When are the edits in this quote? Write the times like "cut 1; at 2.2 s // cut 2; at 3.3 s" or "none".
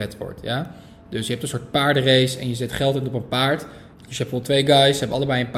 cut 1; at 3.9 s